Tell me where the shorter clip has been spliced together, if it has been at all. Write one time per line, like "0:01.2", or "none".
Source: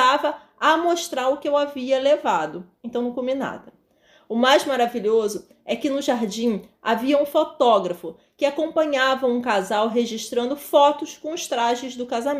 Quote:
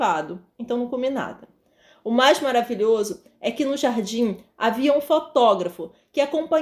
none